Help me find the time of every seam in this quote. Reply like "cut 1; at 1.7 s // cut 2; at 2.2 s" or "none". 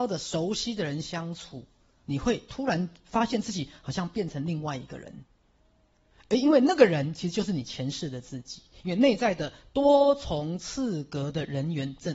none